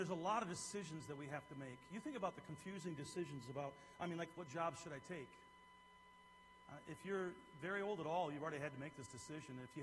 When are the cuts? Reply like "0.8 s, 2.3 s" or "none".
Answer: 4.3 s